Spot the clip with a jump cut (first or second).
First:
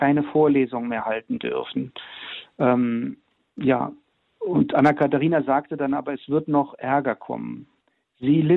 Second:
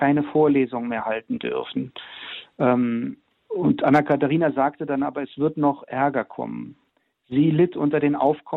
second